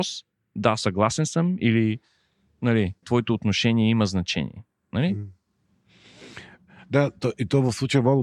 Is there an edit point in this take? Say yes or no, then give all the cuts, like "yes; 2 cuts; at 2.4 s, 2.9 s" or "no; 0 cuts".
yes; 1 cut; at 3.0 s